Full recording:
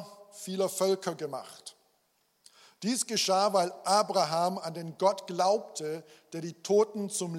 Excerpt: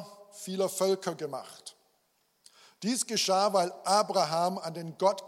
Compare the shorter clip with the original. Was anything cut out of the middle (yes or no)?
no